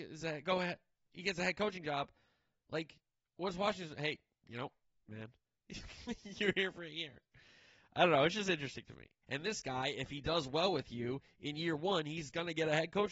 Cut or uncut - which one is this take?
cut